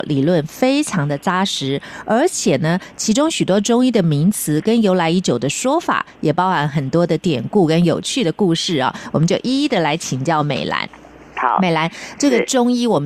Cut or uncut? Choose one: uncut